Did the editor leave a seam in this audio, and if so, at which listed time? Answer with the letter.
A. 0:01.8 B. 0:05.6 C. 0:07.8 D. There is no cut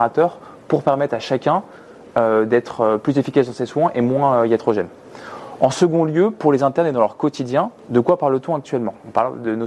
C